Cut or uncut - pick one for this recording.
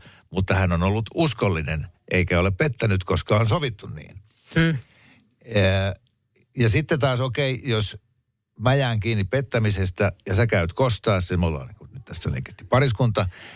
uncut